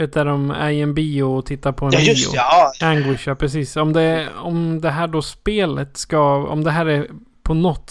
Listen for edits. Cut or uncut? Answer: cut